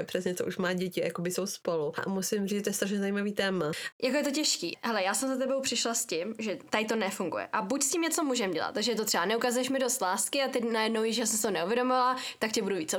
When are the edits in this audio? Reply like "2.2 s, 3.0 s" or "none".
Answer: 3.9 s